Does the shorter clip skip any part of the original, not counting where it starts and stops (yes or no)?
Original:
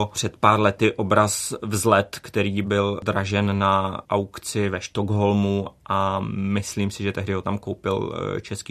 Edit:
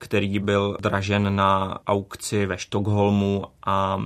no